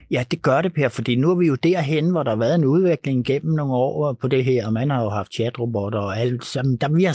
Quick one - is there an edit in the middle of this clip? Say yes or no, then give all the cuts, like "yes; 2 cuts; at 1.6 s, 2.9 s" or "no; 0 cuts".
no; 0 cuts